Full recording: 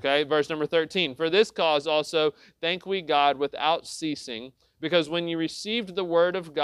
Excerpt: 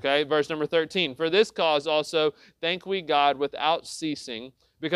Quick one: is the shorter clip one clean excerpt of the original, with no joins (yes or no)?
yes